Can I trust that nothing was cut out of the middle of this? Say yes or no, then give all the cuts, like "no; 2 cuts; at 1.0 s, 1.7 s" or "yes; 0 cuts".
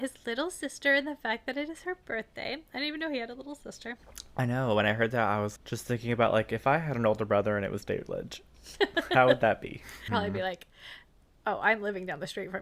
no; 2 cuts; at 5.6 s, 10.1 s